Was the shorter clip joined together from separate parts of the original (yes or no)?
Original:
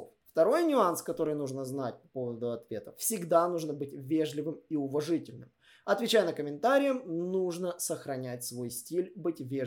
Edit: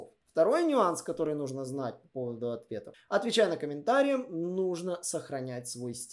yes